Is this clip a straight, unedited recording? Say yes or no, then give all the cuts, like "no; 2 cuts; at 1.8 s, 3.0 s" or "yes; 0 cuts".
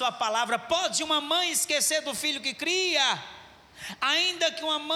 yes; 0 cuts